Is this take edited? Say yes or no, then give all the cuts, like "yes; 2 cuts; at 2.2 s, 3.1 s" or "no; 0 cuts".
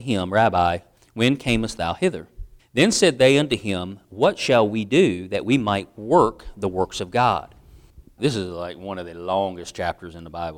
yes; 2 cuts; at 2.6 s, 8.2 s